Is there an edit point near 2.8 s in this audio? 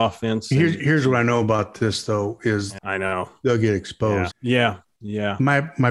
yes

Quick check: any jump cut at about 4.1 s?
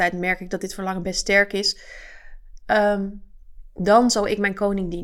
no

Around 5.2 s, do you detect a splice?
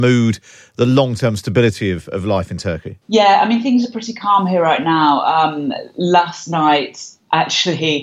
no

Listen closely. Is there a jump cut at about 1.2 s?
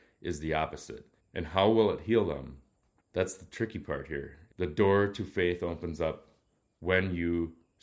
yes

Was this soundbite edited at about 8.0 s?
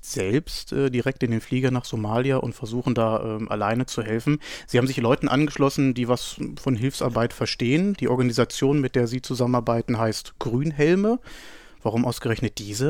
no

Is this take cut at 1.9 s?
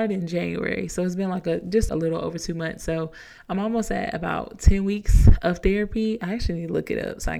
yes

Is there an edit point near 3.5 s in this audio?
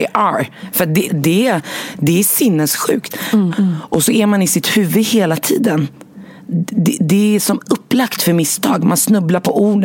yes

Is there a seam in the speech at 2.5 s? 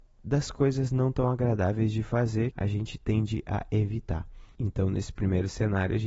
yes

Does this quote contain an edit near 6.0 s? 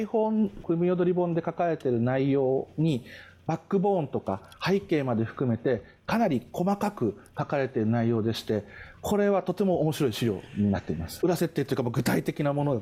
no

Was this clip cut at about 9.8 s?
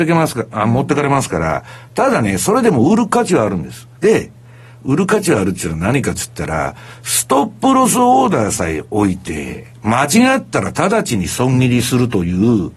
no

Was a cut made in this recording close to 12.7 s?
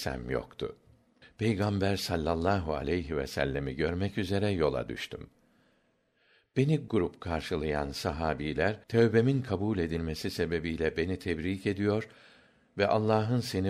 no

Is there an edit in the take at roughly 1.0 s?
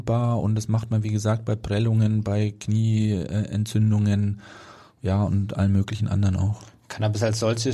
no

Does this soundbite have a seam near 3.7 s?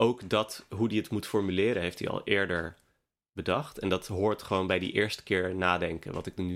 no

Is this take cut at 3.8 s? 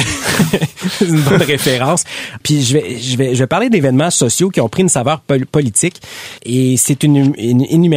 no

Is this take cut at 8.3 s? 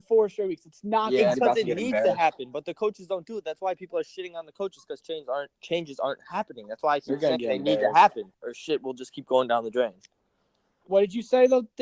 yes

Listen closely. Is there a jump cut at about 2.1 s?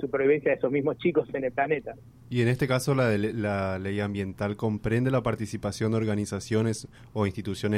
yes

